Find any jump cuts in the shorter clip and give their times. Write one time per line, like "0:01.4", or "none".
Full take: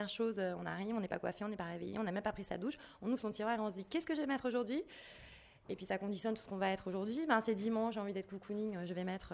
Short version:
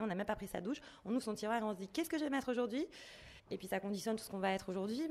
0:03.4